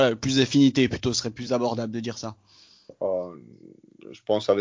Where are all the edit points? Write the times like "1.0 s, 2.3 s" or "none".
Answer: none